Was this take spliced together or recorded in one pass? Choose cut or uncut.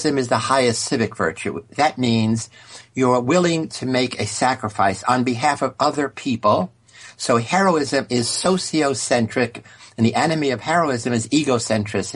uncut